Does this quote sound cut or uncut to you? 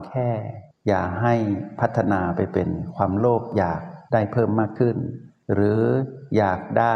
uncut